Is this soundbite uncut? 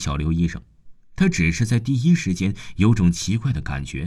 yes; 0 cuts

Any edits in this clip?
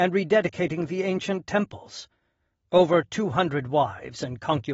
no; 0 cuts

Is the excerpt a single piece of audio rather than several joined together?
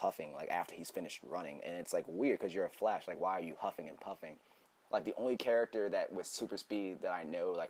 yes; 0 cuts

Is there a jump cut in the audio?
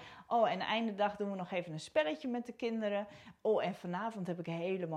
no; 0 cuts

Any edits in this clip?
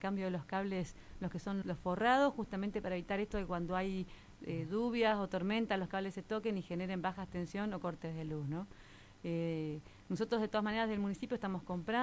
yes; 1 cut; at 1.6 s

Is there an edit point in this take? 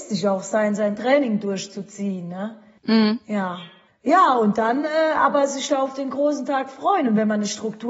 no; 0 cuts

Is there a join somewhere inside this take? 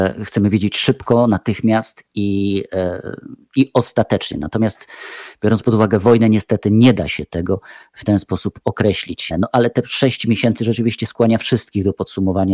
yes; 1 cut; at 9.3 s

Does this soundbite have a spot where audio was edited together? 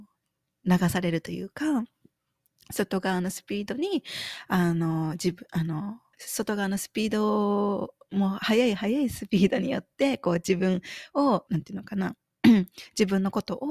yes; 2 cuts; at 6.1 s, 11.5 s

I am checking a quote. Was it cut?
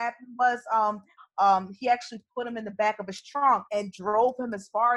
yes; 2 cuts; at 1.2 s, 3.7 s

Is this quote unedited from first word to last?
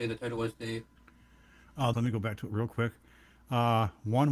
no; 1 cut; at 1.9 s

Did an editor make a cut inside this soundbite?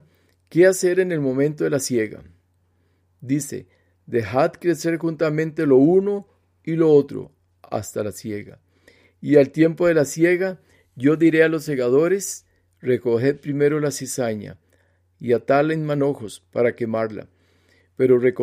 no; 0 cuts

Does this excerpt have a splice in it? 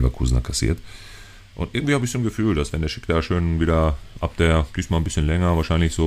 no; 0 cuts

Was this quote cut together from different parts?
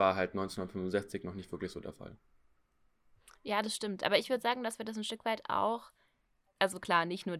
no; 0 cuts

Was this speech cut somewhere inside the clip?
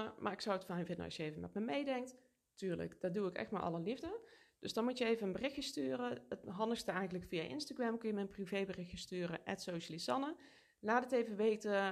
no; 0 cuts

